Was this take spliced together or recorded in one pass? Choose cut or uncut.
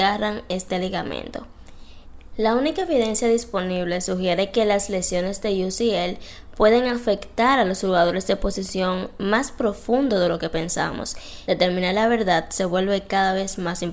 cut